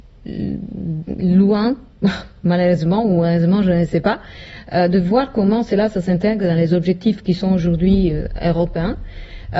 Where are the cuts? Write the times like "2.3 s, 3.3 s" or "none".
none